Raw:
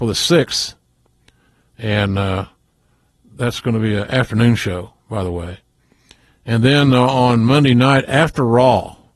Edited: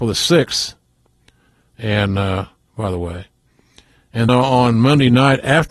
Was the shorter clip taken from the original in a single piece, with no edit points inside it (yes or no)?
no